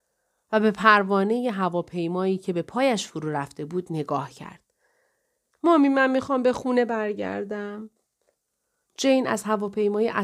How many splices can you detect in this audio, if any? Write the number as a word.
one